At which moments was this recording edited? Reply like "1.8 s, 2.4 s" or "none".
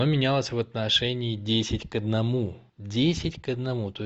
2.7 s